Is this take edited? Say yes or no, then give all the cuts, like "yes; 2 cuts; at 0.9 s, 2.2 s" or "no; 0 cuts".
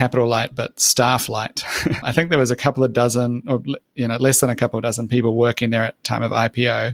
no; 0 cuts